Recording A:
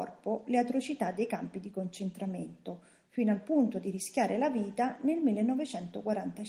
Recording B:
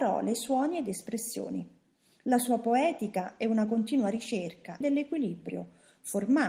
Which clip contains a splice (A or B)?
B